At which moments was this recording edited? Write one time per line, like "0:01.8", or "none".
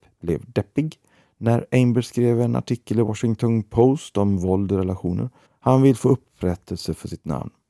0:05.5